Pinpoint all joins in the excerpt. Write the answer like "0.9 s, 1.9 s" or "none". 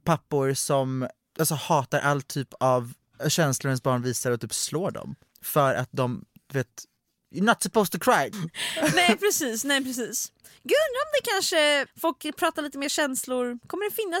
8.3 s, 11.9 s